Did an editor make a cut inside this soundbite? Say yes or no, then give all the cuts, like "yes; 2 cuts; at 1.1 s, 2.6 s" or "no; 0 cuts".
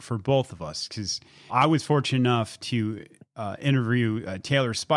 yes; 1 cut; at 1.5 s